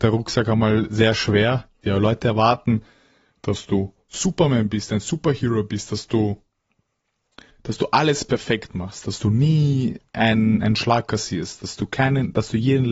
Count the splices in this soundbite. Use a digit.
1